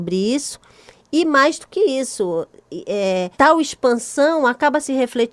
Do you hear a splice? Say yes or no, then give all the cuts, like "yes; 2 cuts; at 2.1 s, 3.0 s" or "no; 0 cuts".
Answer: yes; 1 cut; at 3.3 s